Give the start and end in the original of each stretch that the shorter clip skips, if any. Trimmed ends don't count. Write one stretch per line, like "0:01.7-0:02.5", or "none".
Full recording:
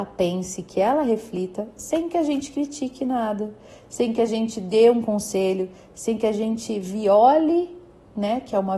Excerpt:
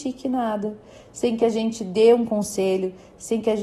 none